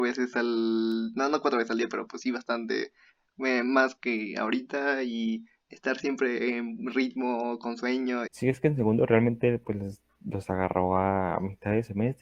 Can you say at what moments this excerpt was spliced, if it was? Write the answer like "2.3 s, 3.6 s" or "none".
8.3 s